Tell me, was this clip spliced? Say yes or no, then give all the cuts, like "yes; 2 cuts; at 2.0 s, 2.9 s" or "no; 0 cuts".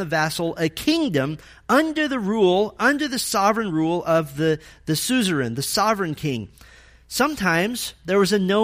no; 0 cuts